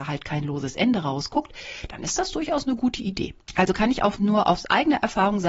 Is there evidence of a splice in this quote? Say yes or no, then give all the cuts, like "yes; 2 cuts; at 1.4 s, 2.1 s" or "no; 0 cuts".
yes; 1 cut; at 3.4 s